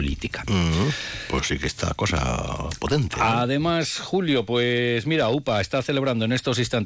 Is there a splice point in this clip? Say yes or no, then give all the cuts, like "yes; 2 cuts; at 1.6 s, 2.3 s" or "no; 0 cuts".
no; 0 cuts